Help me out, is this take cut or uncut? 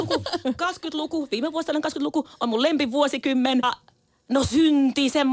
cut